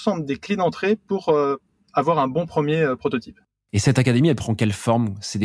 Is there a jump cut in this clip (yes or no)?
no